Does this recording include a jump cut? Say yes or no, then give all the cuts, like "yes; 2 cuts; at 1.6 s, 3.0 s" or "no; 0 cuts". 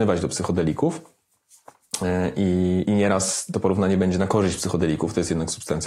yes; 1 cut; at 2.9 s